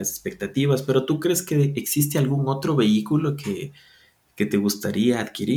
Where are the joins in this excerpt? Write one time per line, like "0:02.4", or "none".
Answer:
none